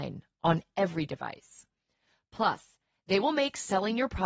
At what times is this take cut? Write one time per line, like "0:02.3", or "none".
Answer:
none